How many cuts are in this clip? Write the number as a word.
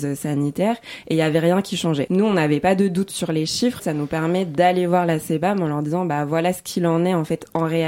two